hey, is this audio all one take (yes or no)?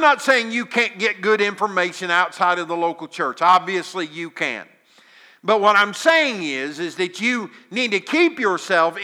yes